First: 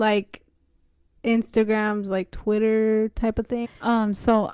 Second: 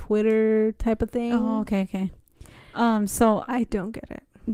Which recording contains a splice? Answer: first; 1 cut; at 3.6 s

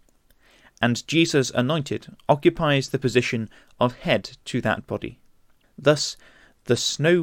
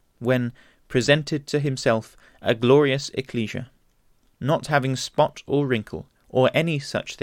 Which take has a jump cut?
first; 1 cut; at 5.6 s

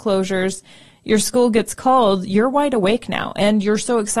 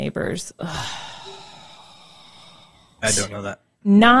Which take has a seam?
second; 1 cut; at 3.0 s

